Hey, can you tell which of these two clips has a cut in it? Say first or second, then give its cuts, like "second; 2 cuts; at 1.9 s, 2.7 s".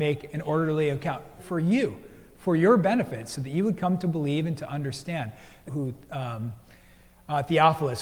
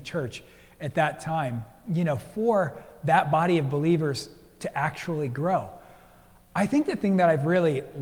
first; 2 cuts; at 1.4 s, 5.7 s